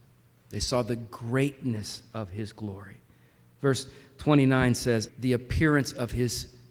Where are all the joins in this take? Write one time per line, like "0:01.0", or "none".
0:05.1